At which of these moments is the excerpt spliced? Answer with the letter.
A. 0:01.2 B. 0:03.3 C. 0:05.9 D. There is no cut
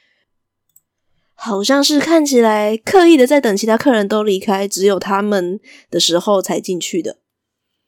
D